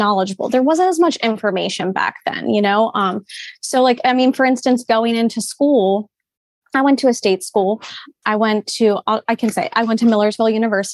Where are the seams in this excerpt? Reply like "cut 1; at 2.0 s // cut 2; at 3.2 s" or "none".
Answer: none